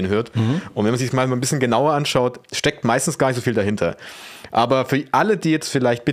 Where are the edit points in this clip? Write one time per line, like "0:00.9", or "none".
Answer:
none